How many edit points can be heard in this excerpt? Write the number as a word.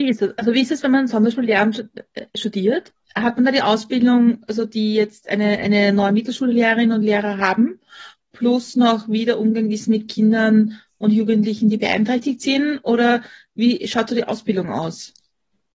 zero